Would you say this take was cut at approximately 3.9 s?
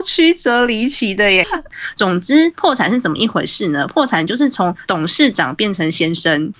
no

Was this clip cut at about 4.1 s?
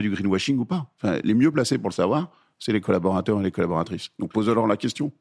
no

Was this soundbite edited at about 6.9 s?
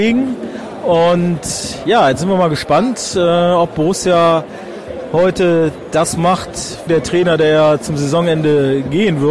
yes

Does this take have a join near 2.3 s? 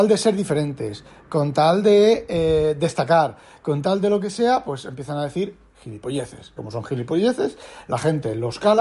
no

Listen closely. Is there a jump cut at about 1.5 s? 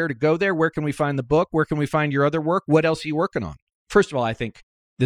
no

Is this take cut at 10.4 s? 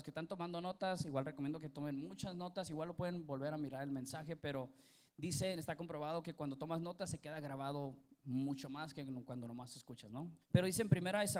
yes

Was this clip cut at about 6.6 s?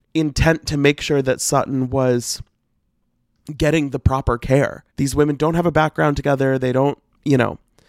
no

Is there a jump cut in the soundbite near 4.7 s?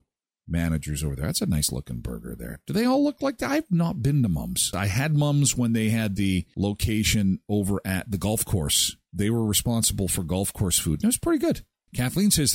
yes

